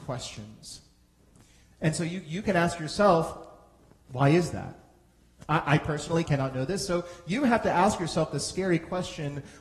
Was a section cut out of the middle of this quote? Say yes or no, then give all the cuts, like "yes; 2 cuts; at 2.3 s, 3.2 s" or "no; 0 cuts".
yes; 2 cuts; at 1.6 s, 6.3 s